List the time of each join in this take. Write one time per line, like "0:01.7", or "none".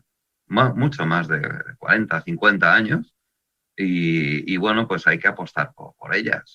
none